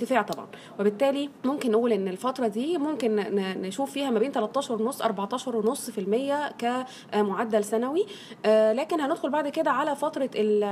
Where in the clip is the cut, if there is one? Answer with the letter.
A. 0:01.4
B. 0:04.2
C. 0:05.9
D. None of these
A